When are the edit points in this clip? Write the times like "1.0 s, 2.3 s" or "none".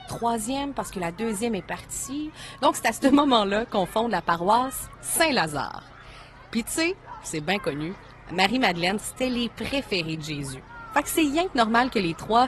9.0 s